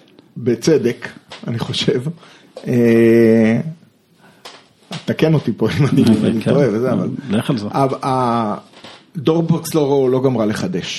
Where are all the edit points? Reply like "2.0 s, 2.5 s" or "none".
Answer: none